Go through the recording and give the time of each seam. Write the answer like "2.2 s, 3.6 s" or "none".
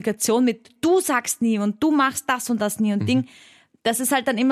none